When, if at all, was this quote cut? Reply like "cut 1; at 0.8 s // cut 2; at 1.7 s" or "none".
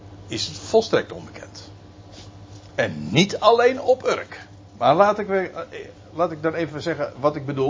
none